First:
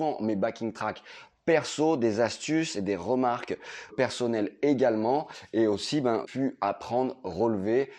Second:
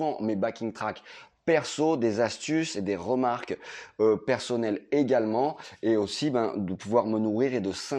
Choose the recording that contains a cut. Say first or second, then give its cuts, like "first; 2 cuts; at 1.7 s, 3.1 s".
first; 2 cuts; at 3.9 s, 6.2 s